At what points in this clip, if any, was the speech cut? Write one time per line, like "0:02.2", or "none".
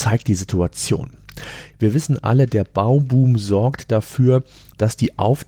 0:01.7